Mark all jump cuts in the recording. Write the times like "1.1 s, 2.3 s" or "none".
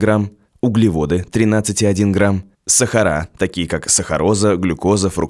2.5 s